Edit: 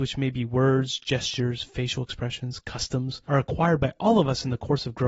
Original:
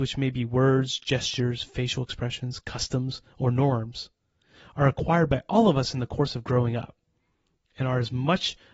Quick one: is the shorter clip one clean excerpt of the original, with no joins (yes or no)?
no